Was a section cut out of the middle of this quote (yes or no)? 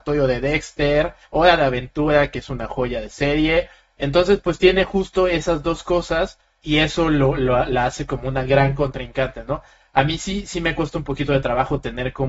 yes